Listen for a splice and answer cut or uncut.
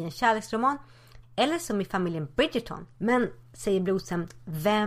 cut